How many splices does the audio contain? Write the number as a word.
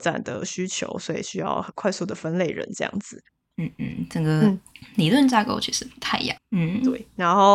two